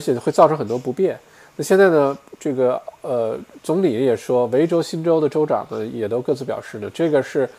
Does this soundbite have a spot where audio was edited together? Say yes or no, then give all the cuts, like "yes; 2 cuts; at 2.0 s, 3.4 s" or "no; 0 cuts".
no; 0 cuts